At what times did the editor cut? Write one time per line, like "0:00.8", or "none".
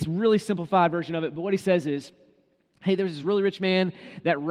none